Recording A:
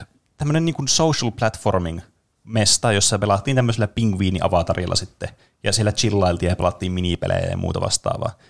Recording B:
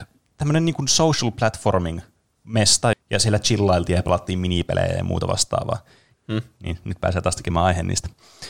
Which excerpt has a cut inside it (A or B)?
B